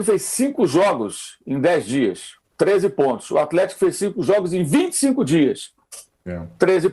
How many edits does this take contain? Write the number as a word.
one